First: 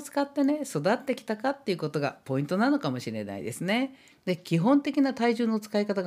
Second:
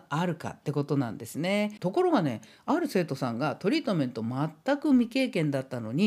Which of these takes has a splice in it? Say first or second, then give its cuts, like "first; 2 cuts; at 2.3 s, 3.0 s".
first; 1 cut; at 4.1 s